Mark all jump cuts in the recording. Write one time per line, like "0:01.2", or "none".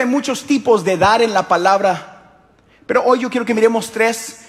none